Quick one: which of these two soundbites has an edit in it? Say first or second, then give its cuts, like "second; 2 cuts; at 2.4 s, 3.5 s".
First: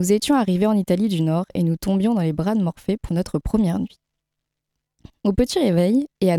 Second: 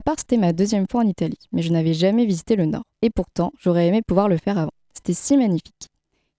second; 1 cut; at 2.9 s